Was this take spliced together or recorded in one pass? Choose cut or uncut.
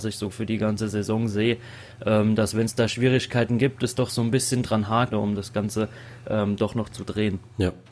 cut